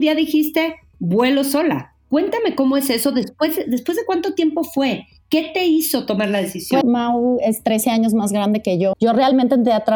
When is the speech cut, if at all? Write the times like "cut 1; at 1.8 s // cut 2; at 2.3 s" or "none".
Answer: cut 1; at 6.8 s // cut 2; at 8.9 s